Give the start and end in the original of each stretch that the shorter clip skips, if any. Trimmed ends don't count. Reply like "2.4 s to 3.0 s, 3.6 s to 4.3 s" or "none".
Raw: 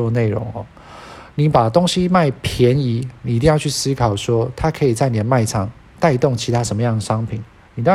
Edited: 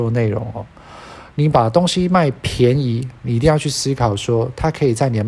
none